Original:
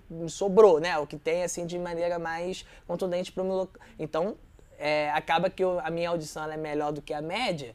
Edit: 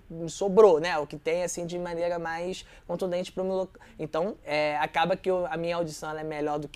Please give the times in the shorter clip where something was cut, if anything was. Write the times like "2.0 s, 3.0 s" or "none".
4.4 s